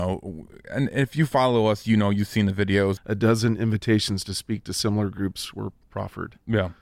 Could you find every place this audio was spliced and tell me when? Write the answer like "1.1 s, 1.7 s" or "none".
3.0 s